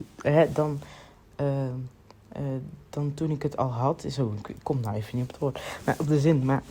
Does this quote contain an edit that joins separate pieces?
no; 0 cuts

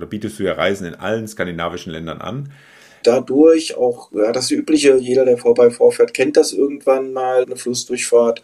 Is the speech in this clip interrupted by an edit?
yes; 2 cuts; at 3.0 s, 7.4 s

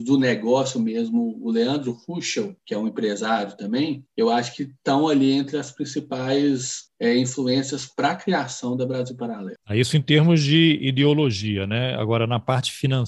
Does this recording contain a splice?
no; 0 cuts

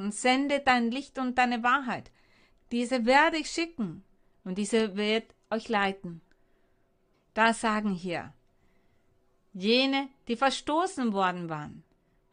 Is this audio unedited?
no; 2 cuts; at 2.6 s, 7.1 s

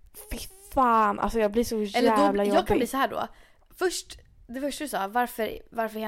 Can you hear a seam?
no; 0 cuts

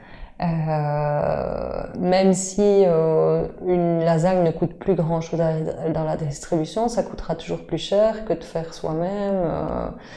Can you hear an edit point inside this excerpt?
no; 0 cuts

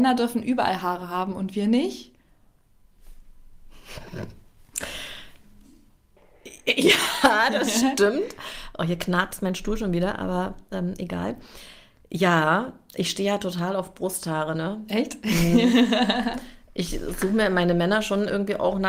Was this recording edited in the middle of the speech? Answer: no; 0 cuts

